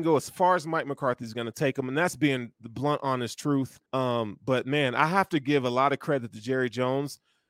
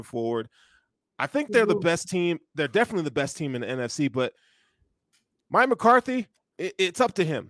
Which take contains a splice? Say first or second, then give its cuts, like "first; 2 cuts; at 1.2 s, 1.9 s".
first; 1 cut; at 3.9 s